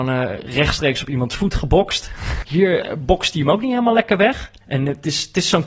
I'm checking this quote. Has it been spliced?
yes; 2 cuts; at 2.4 s, 4.6 s

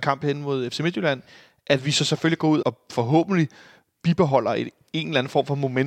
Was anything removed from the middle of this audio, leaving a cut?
yes; 1 cut; at 2.6 s

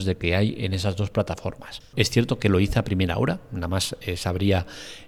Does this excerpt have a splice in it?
yes; 1 cut; at 1.9 s

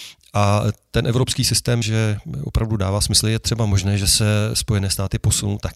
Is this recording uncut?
no; 1 cut; at 1.8 s

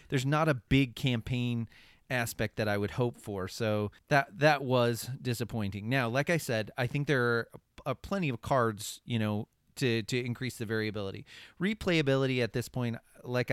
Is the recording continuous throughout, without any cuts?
yes; 0 cuts

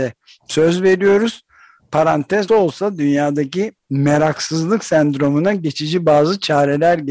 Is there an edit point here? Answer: yes; 1 cut; at 2.5 s

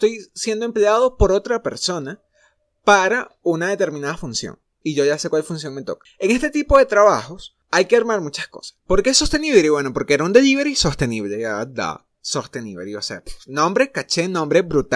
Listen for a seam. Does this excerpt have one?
yes; 1 cut; at 8.8 s

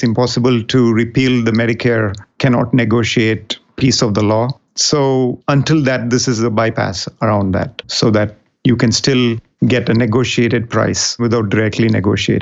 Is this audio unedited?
no; 1 cut; at 11.2 s

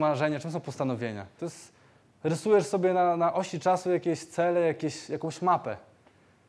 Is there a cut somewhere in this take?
yes; 1 cut; at 1.4 s

